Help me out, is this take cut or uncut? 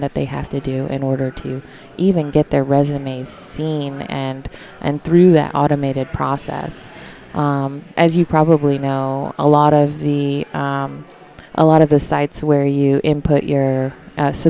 cut